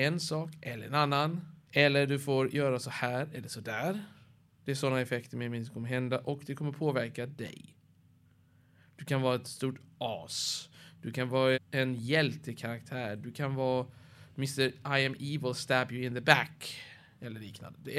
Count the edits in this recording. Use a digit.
1